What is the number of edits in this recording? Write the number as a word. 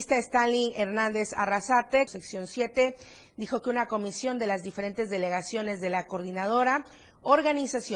one